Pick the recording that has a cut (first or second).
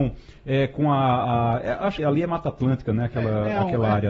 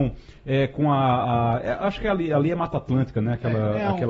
first